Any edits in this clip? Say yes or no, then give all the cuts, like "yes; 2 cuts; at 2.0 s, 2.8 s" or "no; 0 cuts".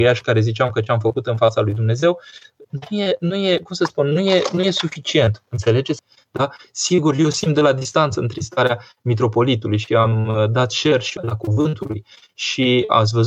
yes; 2 cuts; at 6.0 s, 11.2 s